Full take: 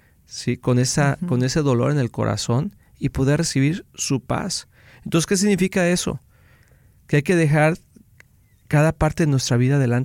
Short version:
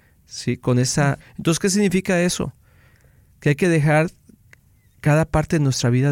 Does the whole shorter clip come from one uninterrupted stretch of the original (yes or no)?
no